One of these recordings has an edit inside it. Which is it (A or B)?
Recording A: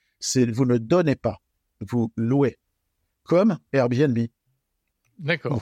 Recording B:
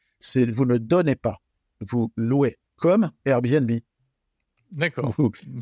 B